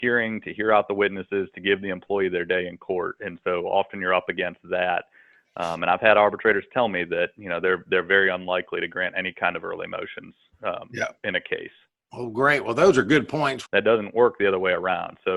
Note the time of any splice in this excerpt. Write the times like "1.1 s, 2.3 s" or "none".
13.7 s